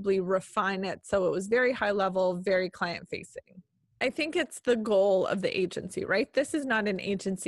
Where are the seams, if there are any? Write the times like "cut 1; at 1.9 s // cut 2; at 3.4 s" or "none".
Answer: cut 1; at 3.9 s